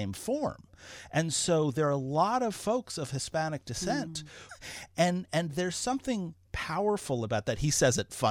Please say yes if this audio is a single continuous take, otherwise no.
no